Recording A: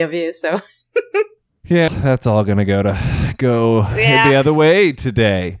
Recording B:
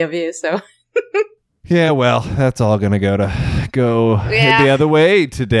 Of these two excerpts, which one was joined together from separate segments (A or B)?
A